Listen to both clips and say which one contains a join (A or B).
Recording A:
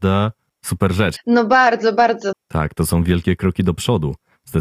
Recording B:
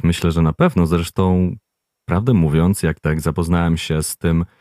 A